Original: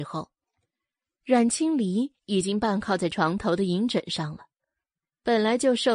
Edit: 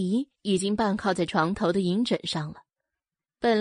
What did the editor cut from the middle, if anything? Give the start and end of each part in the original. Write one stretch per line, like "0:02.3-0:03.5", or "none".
none